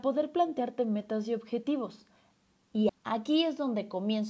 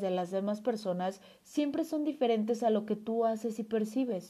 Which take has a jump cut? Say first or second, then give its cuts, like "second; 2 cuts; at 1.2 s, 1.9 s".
first; 1 cut; at 2.9 s